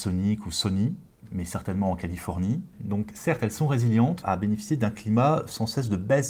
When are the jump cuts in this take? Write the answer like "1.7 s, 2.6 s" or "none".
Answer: 2.7 s, 4.2 s